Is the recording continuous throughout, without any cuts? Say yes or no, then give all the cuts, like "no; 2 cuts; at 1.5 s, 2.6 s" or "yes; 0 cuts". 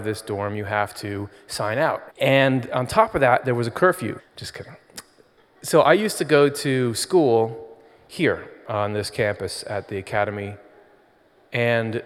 no; 2 cuts; at 2.1 s, 4.2 s